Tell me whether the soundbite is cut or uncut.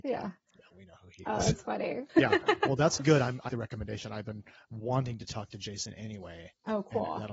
cut